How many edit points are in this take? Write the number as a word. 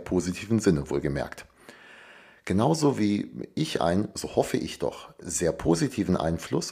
zero